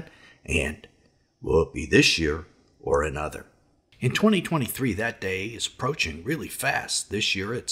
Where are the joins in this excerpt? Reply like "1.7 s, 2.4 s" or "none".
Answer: none